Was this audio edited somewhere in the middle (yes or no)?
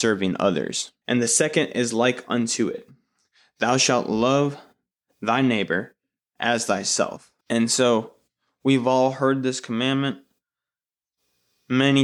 yes